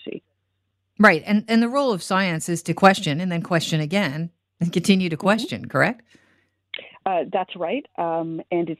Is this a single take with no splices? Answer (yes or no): yes